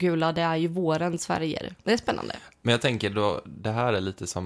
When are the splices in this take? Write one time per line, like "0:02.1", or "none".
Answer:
0:01.8